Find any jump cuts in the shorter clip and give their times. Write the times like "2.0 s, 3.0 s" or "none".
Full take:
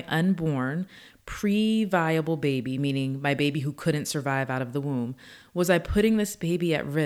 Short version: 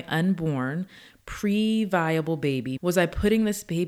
2.8 s